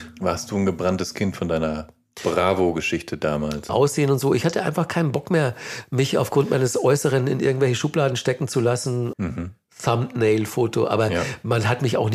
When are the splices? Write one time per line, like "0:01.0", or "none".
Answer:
0:03.7
0:09.1